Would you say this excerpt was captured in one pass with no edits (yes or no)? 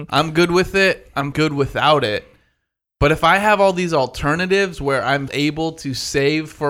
no